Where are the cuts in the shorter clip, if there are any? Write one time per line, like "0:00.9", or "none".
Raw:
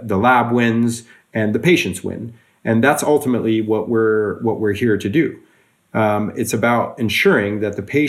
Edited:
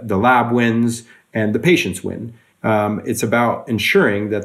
0:02.5